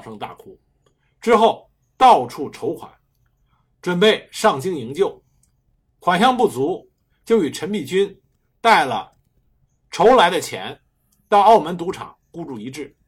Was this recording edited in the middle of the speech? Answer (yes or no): no